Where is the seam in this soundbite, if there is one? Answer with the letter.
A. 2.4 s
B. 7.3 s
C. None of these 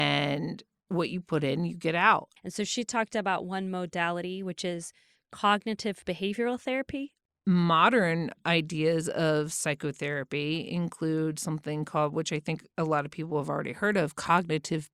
A